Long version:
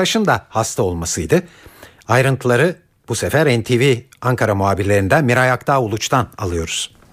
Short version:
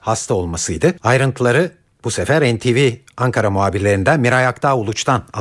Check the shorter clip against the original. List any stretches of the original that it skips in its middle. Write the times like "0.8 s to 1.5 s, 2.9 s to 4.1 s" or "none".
1.5 s to 2.0 s